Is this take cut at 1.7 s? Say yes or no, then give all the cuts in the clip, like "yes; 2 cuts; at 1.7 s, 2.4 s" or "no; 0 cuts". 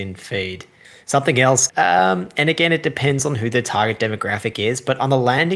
yes; 1 cut; at 1.7 s